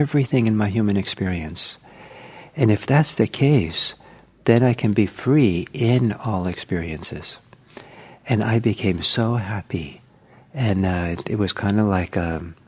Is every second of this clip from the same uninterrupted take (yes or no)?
yes